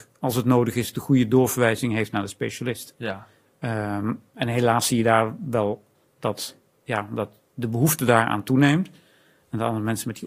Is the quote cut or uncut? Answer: uncut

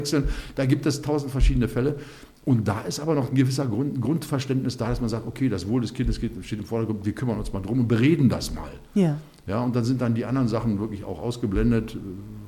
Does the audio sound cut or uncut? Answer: uncut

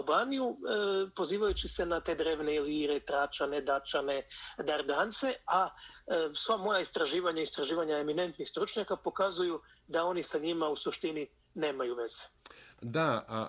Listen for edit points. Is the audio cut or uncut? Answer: uncut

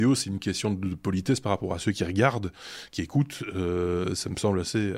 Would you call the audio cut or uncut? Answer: uncut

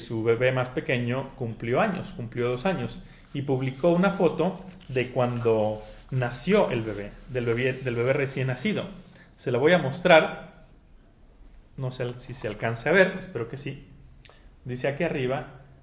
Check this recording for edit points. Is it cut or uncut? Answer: uncut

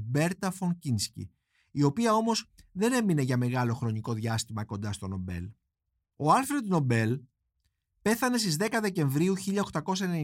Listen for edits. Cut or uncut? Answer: uncut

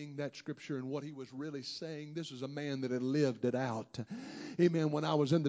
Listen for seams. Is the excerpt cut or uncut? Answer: uncut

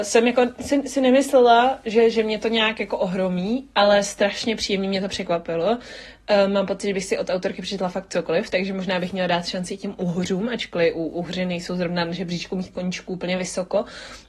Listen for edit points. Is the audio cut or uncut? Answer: uncut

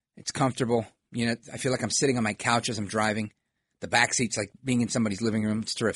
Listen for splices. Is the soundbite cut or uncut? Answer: uncut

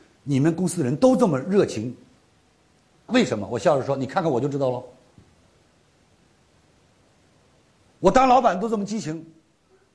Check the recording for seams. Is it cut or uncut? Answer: cut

